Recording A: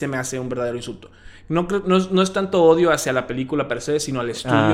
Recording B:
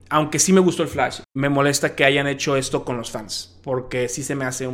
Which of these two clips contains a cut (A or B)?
B